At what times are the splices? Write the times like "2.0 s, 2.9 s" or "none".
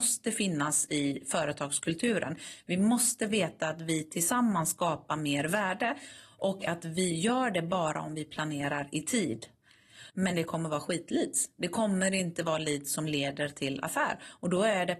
10.1 s